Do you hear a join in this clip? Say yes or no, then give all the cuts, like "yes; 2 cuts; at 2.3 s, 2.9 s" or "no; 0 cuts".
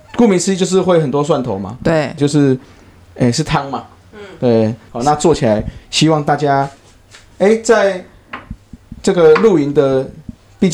yes; 2 cuts; at 2.2 s, 4.9 s